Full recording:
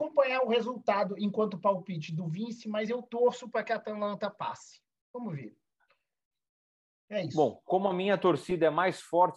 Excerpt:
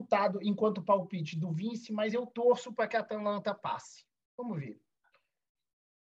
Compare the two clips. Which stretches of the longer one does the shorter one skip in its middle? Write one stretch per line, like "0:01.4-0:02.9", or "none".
none